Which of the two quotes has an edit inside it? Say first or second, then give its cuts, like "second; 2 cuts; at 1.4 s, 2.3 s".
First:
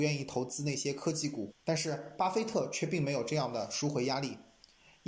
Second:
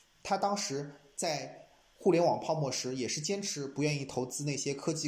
first; 1 cut; at 1.5 s